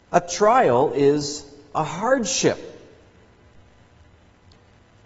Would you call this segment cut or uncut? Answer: uncut